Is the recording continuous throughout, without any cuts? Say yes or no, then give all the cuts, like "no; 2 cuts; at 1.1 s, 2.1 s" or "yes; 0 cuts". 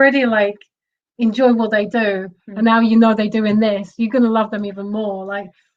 yes; 0 cuts